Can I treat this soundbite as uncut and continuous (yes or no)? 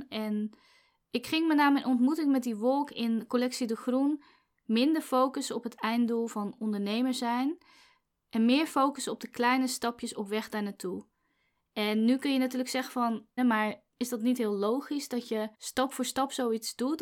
no